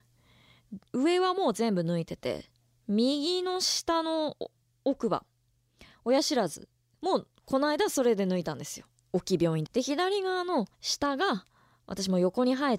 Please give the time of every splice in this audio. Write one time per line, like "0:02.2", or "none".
0:09.7
0:10.7